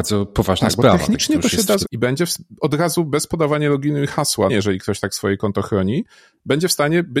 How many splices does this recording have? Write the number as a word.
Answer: two